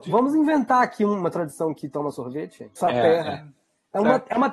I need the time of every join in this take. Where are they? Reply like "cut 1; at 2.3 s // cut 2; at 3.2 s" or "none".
cut 1; at 2.8 s